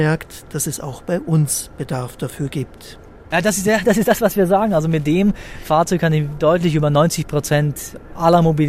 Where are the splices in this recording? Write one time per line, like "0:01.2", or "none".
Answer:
0:03.3